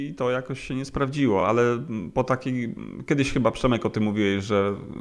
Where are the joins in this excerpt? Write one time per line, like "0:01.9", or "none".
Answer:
none